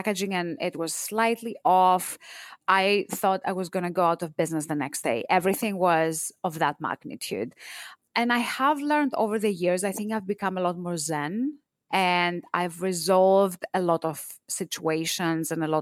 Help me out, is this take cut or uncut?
cut